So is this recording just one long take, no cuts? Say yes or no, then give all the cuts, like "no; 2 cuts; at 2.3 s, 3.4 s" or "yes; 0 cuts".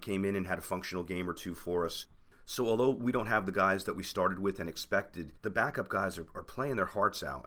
yes; 0 cuts